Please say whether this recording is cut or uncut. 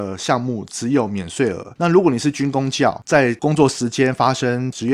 cut